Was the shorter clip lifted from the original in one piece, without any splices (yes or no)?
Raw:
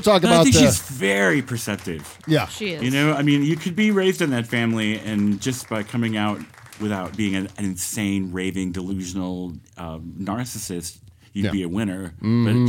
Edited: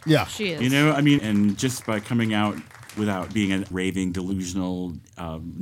no